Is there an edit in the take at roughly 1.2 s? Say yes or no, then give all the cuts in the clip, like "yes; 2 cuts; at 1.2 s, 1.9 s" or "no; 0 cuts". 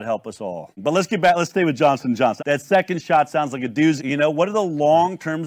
no; 2 cuts; at 2.4 s, 4.0 s